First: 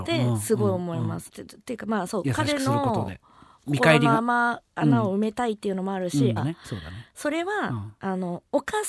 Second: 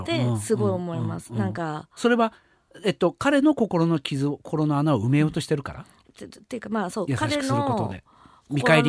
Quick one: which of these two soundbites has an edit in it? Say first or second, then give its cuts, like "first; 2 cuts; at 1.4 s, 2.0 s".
first; 2 cuts; at 1.3 s, 6.4 s